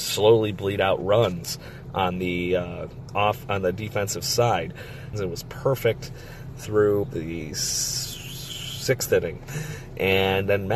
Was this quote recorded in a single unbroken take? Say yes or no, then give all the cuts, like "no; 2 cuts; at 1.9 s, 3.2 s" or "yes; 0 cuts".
no; 2 cuts; at 5.1 s, 7.0 s